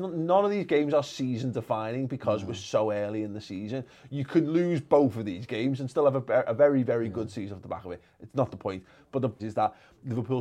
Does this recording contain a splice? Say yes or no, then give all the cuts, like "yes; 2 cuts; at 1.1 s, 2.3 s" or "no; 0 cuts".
yes; 1 cut; at 9.4 s